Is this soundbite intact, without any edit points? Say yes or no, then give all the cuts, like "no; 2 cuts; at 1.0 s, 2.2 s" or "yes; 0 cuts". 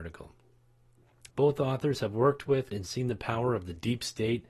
no; 2 cuts; at 1.3 s, 2.7 s